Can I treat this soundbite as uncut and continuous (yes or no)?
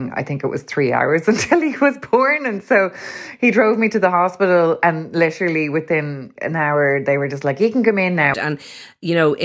no